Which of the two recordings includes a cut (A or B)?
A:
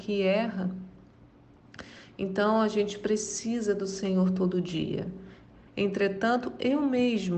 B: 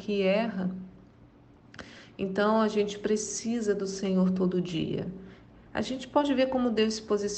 A